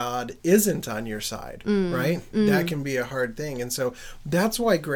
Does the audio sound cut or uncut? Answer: uncut